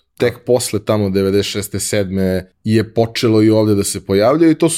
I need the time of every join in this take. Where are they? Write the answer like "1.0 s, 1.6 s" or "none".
2.5 s